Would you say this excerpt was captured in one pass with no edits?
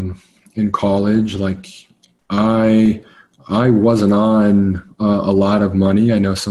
yes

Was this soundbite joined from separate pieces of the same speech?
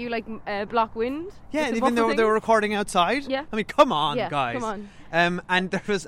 no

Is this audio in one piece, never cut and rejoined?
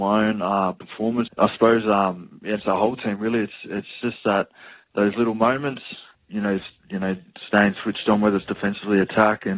no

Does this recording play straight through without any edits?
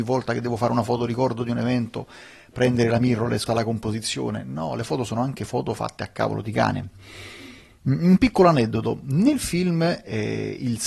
no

